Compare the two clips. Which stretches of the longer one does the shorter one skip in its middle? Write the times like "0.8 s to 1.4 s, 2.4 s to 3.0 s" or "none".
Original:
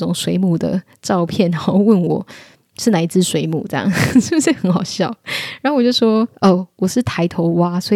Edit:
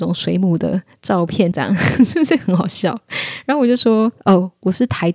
1.5 s to 3.7 s